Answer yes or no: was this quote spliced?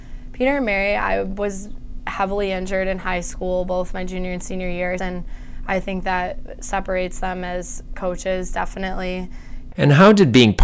yes